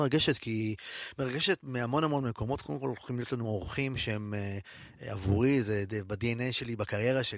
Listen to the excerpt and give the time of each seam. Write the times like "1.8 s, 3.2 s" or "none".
none